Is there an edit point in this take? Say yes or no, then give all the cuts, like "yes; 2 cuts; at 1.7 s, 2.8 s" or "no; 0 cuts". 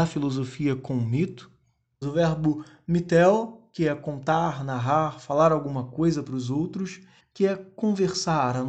yes; 2 cuts; at 2.0 s, 7.2 s